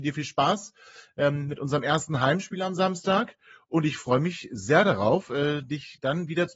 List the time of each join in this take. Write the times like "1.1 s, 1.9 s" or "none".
none

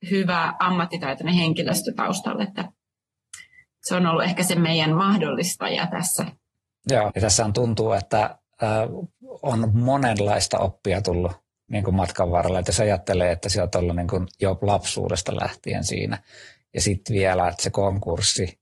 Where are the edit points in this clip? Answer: 7.1 s

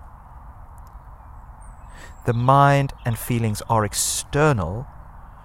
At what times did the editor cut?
none

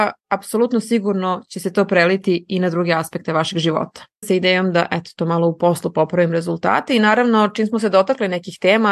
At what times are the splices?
4.2 s

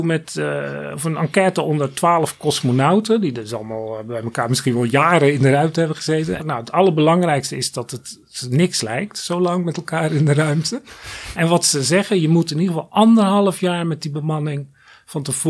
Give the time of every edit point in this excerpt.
6.4 s

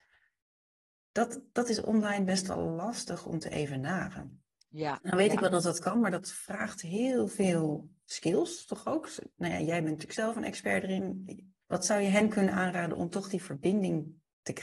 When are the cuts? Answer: 11.6 s

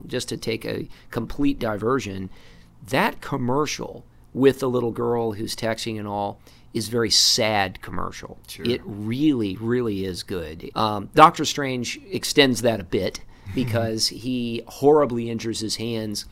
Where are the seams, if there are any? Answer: 10.7 s

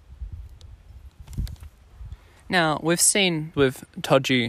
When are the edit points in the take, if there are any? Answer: 3.5 s

